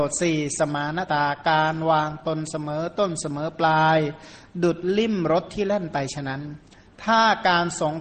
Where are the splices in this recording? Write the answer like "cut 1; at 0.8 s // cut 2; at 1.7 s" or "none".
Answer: cut 1; at 1.1 s